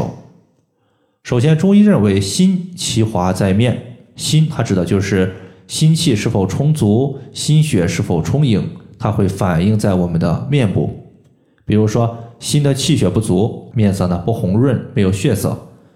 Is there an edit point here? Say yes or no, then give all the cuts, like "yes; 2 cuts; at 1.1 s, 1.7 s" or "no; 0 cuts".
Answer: yes; 1 cut; at 13.7 s